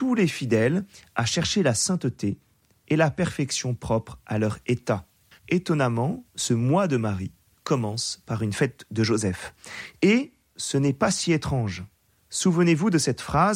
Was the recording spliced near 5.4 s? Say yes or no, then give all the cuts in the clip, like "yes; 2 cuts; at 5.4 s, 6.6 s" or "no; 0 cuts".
yes; 1 cut; at 5.4 s